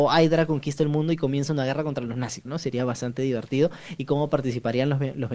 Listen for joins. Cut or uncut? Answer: cut